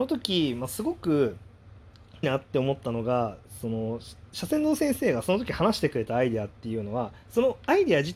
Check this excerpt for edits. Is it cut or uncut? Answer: cut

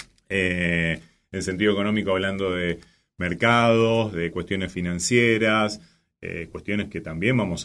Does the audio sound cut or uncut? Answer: uncut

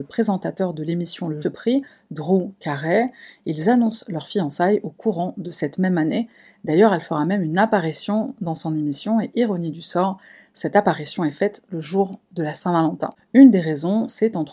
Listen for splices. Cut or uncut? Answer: cut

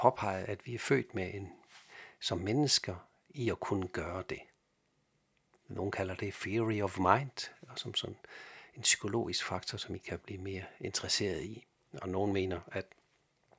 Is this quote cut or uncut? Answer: uncut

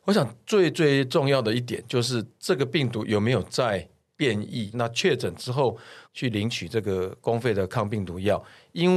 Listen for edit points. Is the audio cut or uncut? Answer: cut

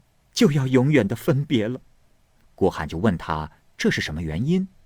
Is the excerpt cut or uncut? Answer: cut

